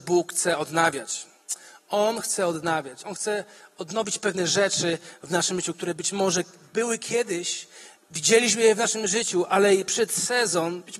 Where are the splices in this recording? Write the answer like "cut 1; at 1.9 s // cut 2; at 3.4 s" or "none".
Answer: none